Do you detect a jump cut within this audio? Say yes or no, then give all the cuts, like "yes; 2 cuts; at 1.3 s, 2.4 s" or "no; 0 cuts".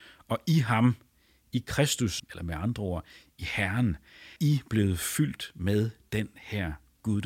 yes; 2 cuts; at 2.2 s, 4.4 s